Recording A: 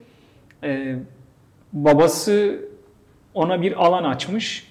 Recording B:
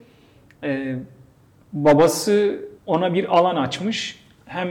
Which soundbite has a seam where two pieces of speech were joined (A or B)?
B